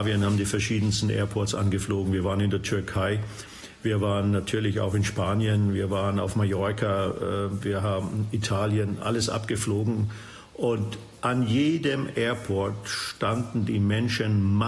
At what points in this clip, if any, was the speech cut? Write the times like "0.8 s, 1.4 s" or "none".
none